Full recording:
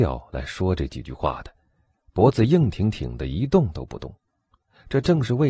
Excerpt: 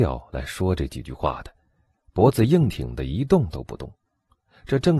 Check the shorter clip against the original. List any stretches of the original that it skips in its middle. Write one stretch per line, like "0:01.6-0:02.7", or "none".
0:02.7-0:02.9